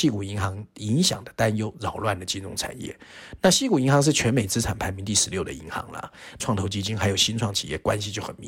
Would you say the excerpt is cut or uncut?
cut